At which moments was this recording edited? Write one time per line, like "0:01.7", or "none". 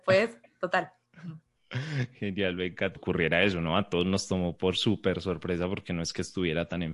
0:03.0

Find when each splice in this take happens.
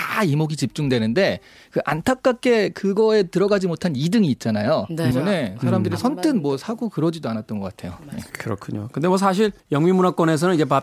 0:05.1
0:09.6

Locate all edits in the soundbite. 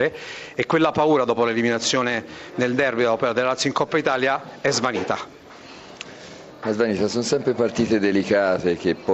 none

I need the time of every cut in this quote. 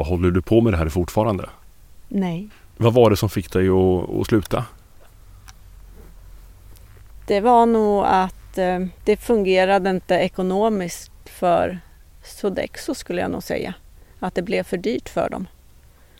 0:02.5

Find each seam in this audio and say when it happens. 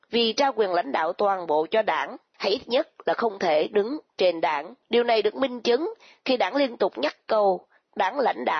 0:02.3
0:04.8

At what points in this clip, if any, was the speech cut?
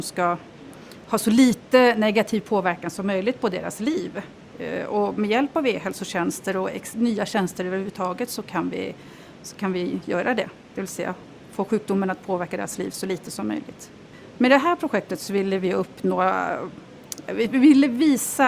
none

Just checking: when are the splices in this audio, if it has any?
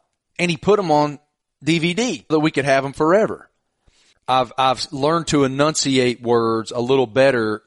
0:02.3
0:04.1

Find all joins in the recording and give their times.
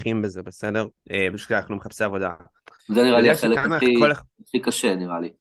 0:01.0
0:02.8

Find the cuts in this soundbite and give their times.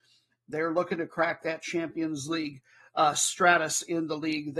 none

